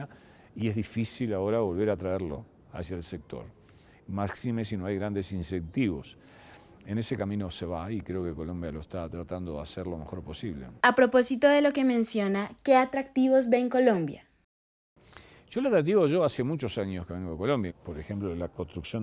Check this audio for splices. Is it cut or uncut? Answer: cut